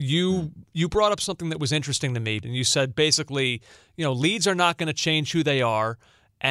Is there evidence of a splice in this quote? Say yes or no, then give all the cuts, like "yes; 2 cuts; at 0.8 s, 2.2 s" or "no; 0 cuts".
yes; 1 cut; at 2.4 s